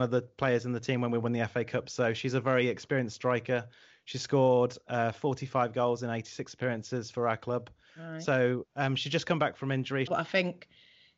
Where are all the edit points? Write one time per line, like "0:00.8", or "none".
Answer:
0:10.1